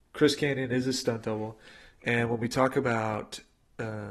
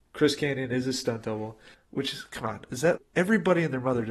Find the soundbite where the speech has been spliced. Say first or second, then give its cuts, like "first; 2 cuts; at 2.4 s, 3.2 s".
second; 2 cuts; at 1.7 s, 3.0 s